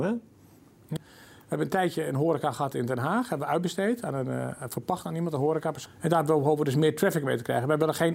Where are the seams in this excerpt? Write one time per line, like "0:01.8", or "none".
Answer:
0:01.0
0:05.9